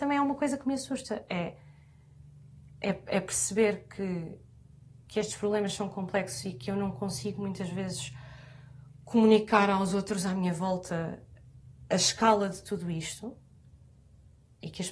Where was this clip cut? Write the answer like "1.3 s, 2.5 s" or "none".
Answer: none